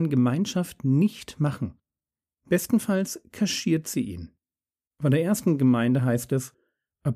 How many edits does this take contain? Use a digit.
2